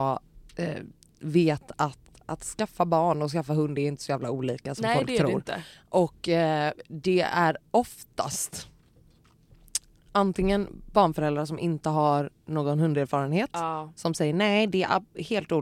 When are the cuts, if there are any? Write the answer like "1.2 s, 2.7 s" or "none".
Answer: none